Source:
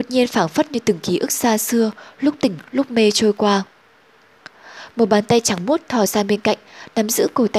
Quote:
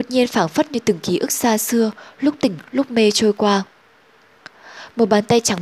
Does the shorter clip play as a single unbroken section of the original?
yes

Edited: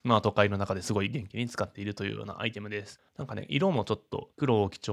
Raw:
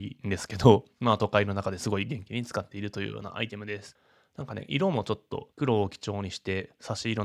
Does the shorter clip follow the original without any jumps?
no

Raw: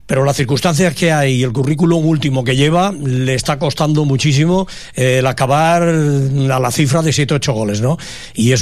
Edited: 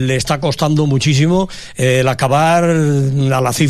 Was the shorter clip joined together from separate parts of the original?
no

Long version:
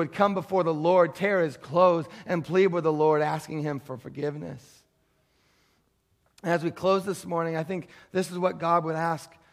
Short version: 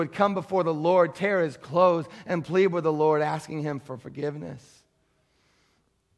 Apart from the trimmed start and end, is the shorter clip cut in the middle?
no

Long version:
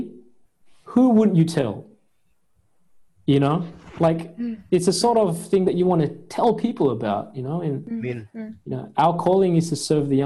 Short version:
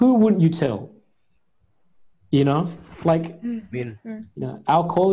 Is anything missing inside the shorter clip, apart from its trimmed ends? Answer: yes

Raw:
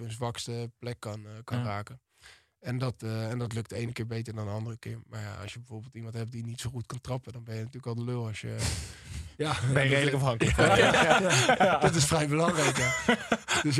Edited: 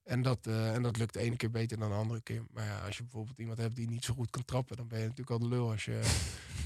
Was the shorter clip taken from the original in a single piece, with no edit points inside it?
yes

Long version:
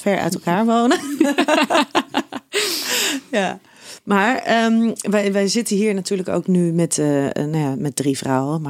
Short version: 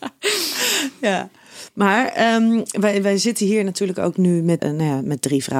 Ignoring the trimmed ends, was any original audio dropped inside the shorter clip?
yes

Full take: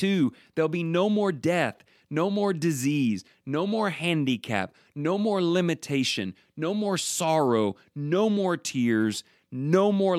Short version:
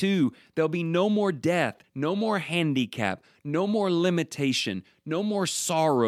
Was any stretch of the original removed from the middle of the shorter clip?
yes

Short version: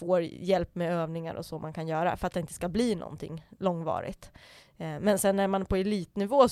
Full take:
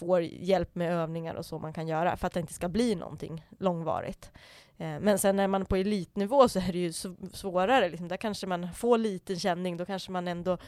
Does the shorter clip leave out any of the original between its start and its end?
no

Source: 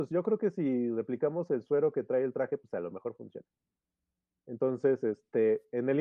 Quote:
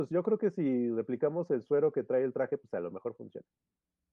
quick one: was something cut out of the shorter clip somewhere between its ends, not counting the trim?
no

